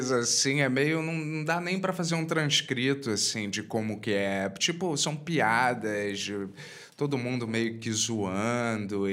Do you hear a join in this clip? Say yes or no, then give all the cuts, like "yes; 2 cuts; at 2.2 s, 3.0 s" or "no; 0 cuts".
no; 0 cuts